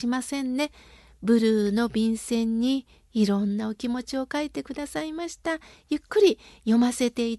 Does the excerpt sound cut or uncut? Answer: uncut